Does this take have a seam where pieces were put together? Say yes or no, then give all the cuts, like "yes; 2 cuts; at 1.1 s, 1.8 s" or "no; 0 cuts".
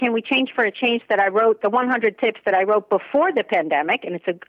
no; 0 cuts